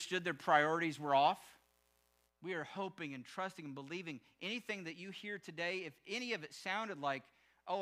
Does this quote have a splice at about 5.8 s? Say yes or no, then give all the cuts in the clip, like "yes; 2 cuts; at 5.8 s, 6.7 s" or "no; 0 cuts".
no; 1 cut; at 2.3 s